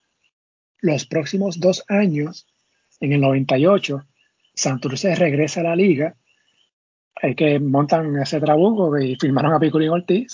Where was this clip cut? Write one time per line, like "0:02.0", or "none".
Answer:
none